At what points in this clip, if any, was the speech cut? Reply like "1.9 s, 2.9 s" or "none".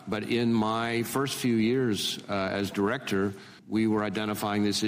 3.6 s